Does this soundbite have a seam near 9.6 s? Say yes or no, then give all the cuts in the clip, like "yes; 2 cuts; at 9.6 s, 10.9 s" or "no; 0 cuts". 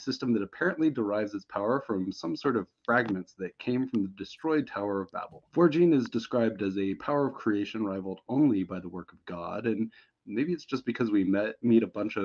no; 1 cut; at 5.5 s